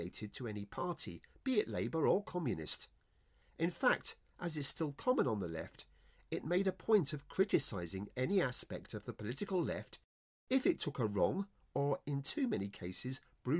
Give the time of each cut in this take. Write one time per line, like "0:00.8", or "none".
none